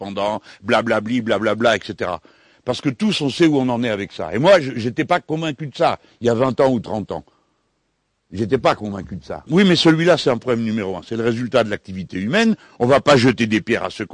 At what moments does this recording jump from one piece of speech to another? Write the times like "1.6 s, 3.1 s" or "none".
9.5 s